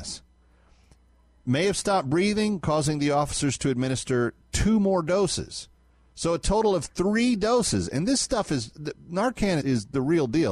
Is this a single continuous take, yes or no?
no